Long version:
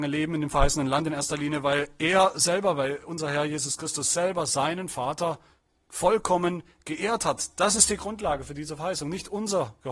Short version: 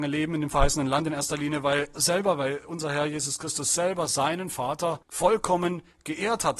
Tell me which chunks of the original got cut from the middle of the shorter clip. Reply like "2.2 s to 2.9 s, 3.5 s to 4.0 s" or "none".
1.9 s to 2.3 s, 5.4 s to 5.8 s